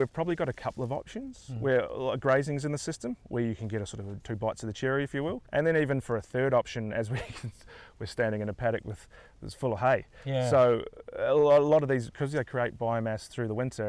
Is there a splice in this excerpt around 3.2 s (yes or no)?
no